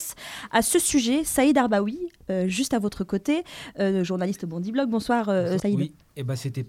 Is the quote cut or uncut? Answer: cut